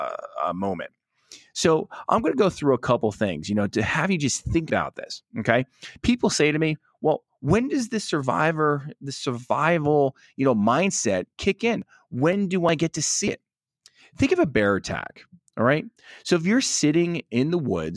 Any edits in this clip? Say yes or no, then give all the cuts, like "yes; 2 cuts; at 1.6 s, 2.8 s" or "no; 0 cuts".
no; 0 cuts